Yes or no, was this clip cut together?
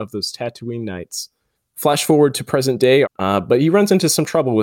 yes